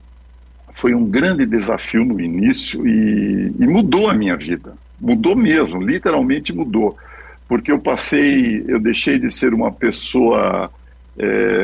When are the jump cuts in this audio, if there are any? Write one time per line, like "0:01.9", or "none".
none